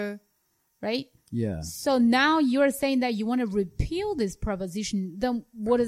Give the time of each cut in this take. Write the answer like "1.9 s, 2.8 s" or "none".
none